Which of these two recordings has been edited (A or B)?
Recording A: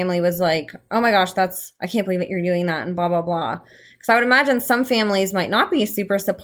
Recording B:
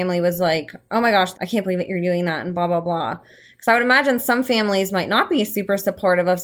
B